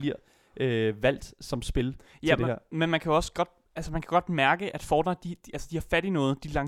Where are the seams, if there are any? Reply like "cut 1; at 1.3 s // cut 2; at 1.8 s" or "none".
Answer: none